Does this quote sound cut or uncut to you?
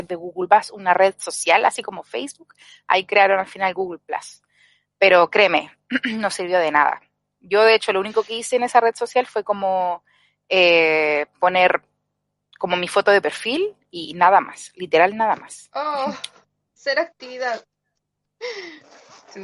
uncut